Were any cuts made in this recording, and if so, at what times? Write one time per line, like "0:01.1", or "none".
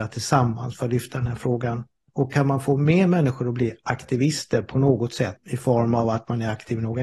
0:02.1
0:05.4